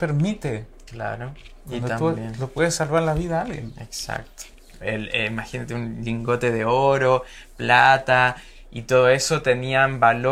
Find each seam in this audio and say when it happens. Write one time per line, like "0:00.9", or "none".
0:04.8